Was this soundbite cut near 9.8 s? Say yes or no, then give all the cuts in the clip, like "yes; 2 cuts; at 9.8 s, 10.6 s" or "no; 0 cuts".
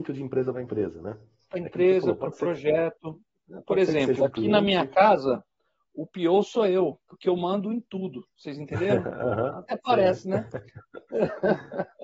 no; 1 cut; at 8.3 s